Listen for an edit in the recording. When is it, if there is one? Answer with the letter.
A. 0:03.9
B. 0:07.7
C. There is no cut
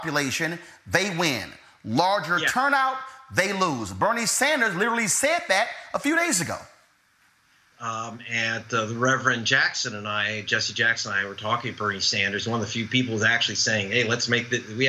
B